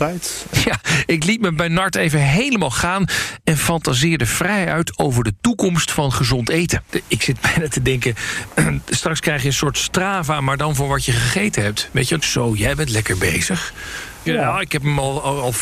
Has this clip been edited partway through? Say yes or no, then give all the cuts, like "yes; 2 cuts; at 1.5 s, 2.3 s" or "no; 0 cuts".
yes; 2 cuts; at 12.2 s, 14.3 s